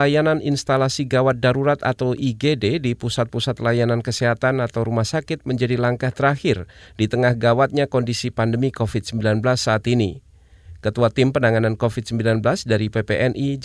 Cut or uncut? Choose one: uncut